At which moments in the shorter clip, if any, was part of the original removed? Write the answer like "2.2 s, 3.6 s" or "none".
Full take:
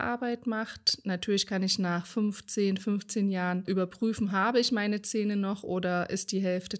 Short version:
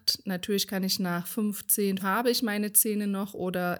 2.0 s